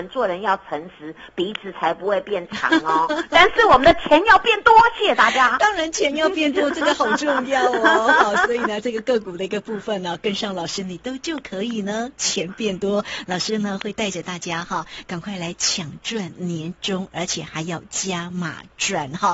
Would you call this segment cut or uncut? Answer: uncut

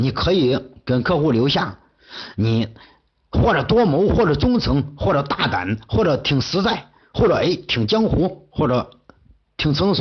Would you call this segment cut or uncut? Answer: uncut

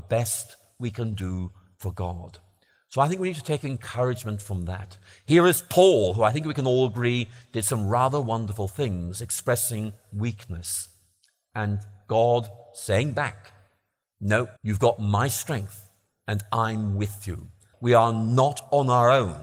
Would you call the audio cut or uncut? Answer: cut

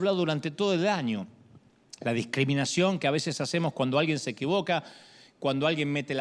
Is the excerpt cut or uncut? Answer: uncut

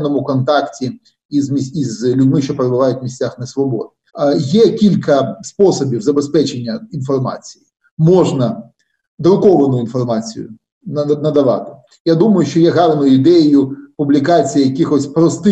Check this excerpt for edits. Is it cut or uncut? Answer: cut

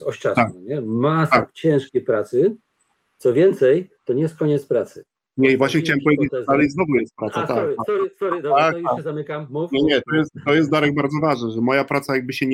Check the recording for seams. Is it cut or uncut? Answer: cut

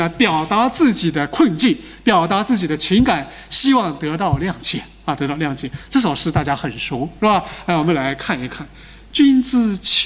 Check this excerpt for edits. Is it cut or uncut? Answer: uncut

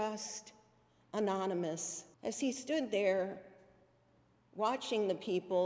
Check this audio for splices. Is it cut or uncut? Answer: cut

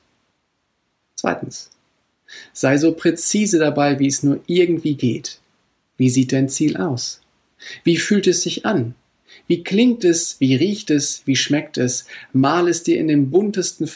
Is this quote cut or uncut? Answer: uncut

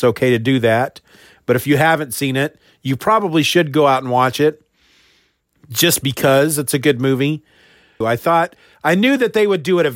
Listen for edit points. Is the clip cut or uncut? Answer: cut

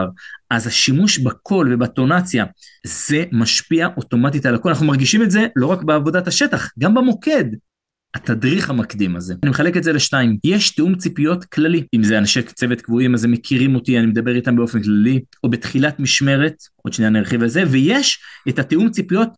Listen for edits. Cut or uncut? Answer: cut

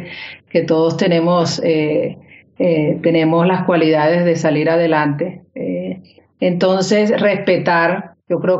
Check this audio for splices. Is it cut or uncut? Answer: uncut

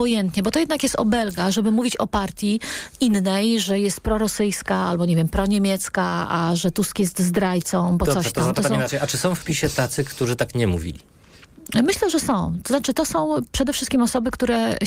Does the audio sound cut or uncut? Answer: uncut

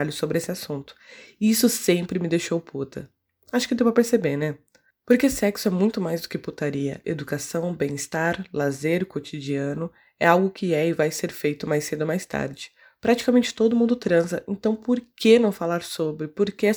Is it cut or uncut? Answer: cut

